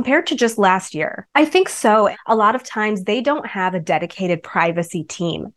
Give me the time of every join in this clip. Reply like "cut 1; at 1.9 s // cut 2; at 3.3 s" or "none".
cut 1; at 1.3 s